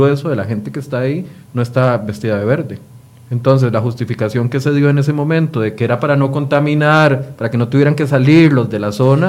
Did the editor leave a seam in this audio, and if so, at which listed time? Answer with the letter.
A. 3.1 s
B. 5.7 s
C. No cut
A